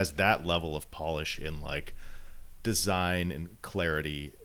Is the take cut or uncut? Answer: uncut